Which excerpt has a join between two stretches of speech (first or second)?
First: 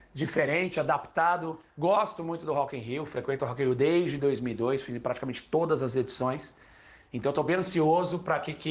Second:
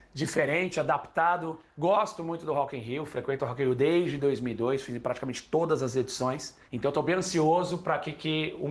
second